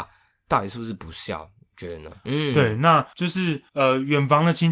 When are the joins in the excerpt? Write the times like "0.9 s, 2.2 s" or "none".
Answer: 2.2 s